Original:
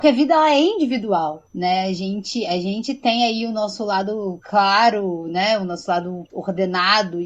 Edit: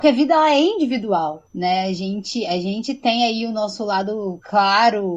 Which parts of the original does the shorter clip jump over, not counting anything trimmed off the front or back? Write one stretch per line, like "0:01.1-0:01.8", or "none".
none